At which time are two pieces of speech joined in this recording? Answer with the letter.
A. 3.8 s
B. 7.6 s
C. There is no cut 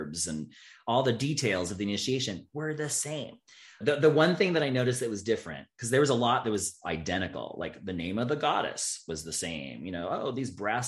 A